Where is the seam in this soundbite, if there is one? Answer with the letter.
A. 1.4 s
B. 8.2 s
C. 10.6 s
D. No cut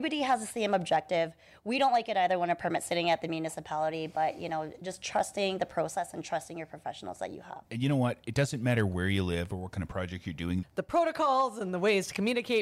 C